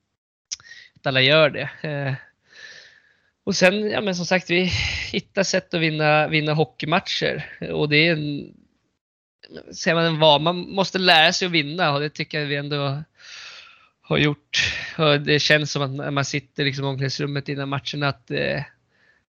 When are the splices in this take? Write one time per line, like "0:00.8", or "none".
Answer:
none